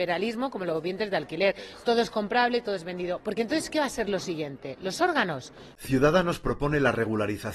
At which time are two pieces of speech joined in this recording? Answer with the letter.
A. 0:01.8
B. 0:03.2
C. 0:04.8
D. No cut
B